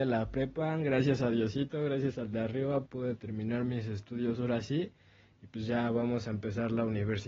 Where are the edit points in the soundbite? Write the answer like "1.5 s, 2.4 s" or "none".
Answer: 2.9 s

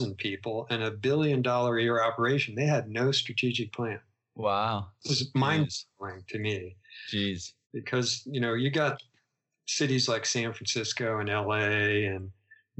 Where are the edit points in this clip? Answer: 7.6 s

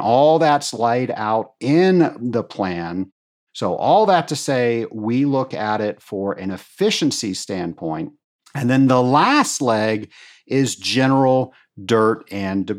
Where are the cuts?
none

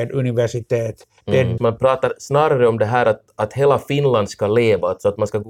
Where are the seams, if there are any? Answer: 1.6 s

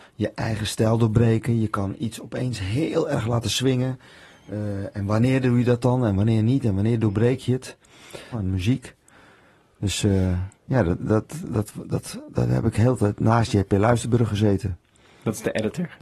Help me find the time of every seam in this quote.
8.3 s

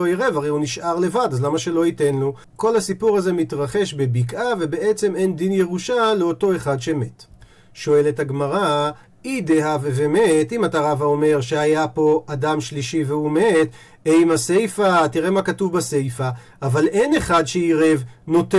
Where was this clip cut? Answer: 2.4 s

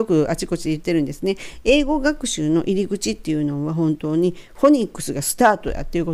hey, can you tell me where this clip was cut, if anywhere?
none

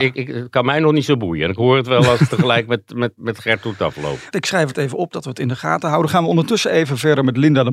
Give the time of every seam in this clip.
4.3 s

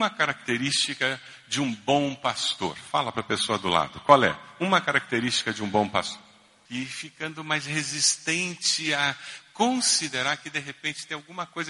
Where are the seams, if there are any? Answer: 6.7 s

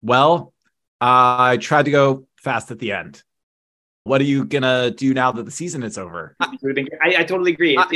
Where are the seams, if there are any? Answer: 4.1 s, 6.4 s

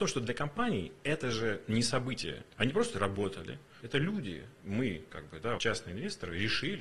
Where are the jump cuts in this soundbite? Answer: 2.5 s, 3.8 s, 5.6 s

